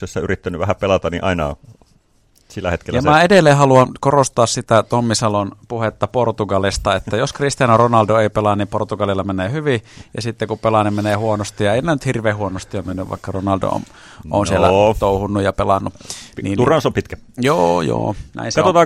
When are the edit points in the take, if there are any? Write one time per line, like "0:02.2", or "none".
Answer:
none

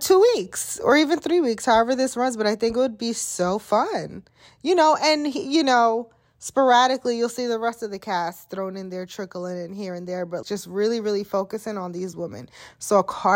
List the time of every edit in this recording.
0:10.4

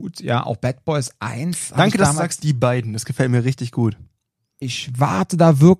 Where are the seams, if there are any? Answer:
0:04.6

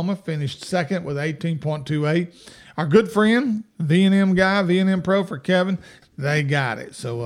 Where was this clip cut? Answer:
0:06.0

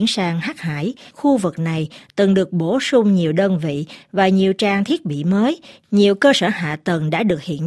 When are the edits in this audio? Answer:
0:01.1

